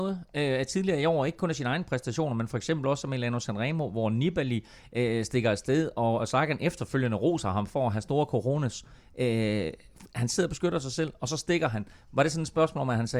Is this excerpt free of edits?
yes; 0 cuts

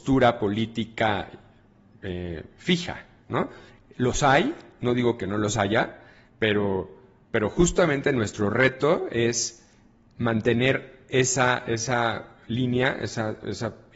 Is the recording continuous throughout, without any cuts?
yes; 0 cuts

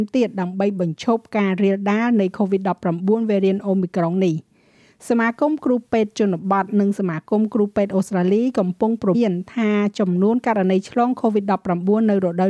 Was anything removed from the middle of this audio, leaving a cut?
yes; 1 cut; at 9.1 s

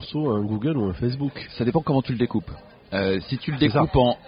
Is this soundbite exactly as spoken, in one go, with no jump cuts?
yes; 0 cuts

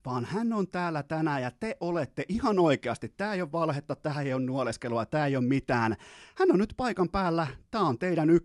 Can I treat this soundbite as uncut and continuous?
yes; 0 cuts

